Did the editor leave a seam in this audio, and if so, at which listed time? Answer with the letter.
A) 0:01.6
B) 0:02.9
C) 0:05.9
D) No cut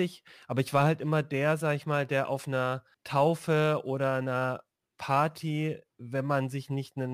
B